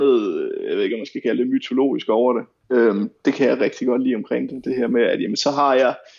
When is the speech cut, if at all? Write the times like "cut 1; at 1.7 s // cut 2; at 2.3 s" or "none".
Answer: cut 1; at 2.6 s